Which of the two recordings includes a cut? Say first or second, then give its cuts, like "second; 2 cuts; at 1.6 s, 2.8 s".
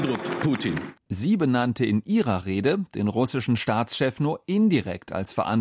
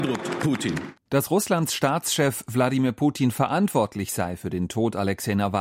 first; 1 cut; at 1.0 s